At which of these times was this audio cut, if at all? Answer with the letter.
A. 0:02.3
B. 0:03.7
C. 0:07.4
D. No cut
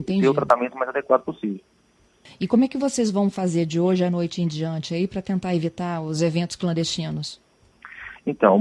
A